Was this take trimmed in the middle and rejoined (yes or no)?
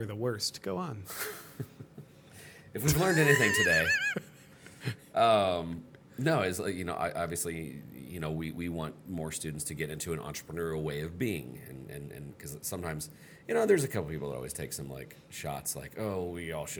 no